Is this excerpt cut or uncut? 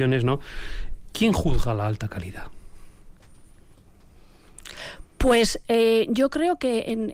uncut